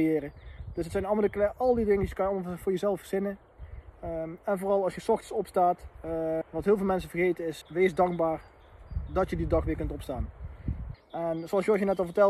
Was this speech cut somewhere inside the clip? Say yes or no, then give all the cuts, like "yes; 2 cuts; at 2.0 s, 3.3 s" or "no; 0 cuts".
yes; 3 cuts; at 6.4 s, 7.6 s, 10.9 s